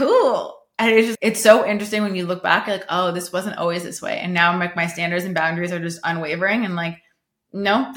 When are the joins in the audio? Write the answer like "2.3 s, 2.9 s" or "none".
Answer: 1.1 s